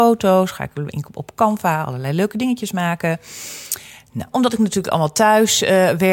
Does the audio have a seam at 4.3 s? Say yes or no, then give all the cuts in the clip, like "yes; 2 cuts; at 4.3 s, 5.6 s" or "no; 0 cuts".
yes; 1 cut; at 4.3 s